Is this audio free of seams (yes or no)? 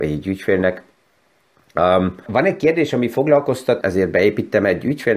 no